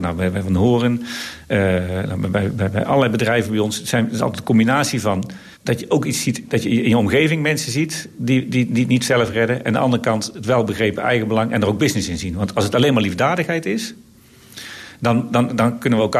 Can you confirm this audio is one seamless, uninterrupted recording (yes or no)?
no